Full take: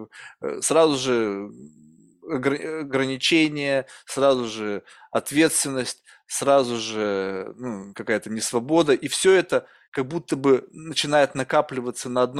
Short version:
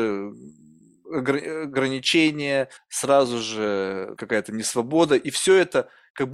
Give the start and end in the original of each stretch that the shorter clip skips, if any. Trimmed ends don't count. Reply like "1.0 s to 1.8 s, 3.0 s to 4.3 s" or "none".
3.9 s to 6.1 s, 7.5 s to 7.9 s